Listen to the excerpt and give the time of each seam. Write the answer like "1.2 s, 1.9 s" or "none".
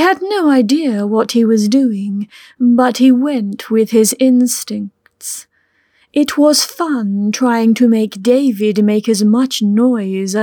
none